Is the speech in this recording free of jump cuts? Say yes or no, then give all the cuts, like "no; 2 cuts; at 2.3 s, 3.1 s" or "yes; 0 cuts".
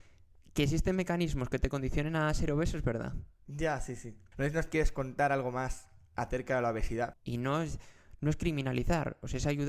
no; 2 cuts; at 4.3 s, 7.1 s